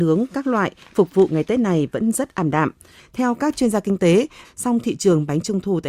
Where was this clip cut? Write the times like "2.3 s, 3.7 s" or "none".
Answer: 3.0 s, 4.4 s